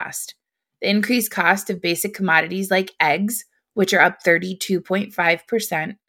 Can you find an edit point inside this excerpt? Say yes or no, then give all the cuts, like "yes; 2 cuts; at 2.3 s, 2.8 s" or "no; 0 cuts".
no; 0 cuts